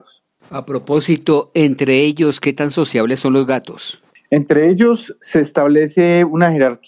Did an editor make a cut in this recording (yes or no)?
no